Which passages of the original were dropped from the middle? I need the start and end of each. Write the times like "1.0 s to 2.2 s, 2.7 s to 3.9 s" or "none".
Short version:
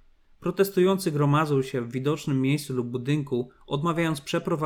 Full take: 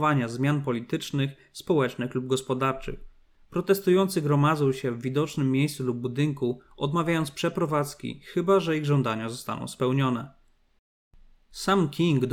none